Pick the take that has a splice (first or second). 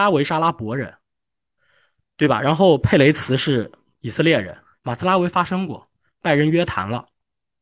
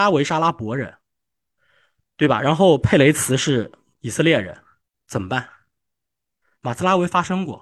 first